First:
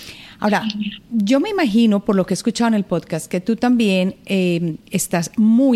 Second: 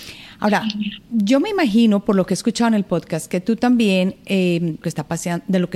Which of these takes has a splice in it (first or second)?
second